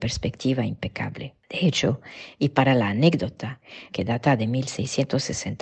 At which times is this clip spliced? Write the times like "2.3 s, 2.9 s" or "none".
1.4 s, 3.9 s